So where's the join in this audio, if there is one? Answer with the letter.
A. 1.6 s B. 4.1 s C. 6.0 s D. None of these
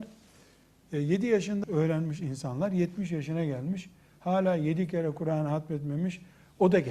A